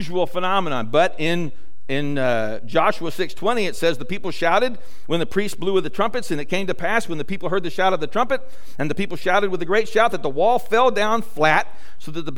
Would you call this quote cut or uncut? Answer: uncut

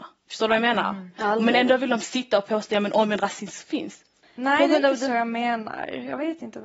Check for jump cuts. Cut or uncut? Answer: cut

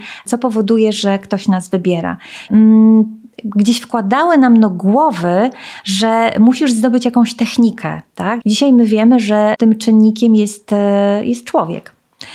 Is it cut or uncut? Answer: cut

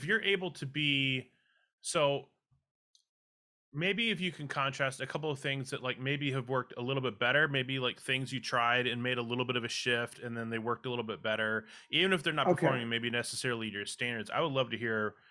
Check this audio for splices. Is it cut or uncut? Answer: uncut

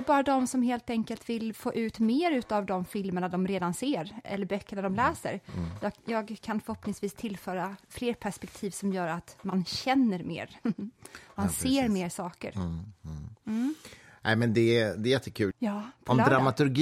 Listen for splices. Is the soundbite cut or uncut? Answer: cut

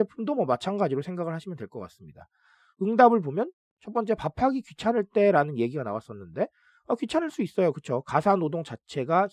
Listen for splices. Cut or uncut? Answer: cut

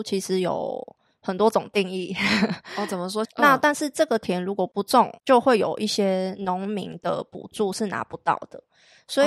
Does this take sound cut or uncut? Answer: cut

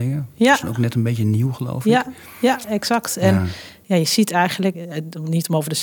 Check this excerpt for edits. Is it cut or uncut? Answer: cut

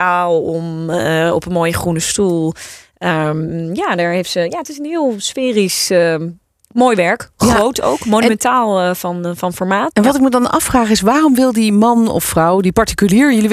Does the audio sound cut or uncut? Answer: cut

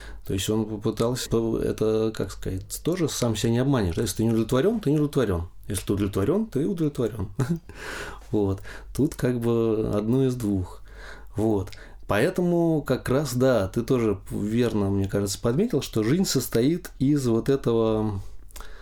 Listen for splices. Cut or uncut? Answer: cut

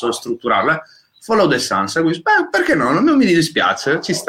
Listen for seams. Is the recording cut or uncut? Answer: uncut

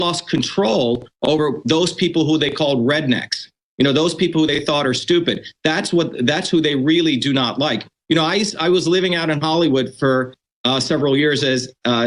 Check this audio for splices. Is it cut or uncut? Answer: uncut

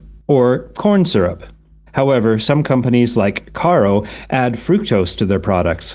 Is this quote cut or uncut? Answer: cut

